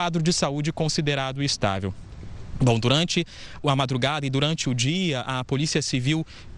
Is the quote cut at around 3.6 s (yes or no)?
yes